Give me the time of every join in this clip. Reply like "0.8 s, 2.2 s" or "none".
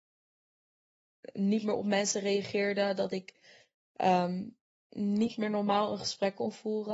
none